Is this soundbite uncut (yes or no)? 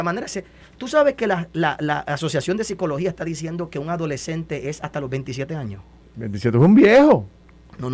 no